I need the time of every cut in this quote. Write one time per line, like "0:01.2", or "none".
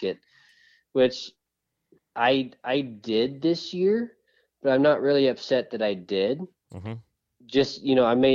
none